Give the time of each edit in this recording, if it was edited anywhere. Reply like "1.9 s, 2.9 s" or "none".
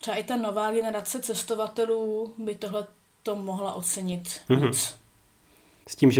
none